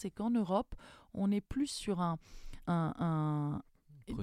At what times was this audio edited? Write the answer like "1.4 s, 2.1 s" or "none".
2.6 s